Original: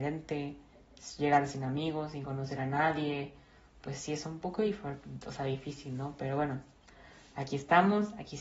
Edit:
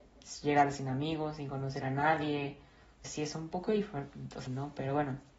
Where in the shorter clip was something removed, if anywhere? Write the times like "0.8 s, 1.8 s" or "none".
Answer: 3.0 s, 4.5 s